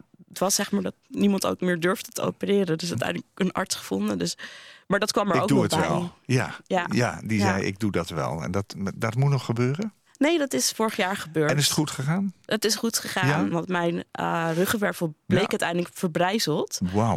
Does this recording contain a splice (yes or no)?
yes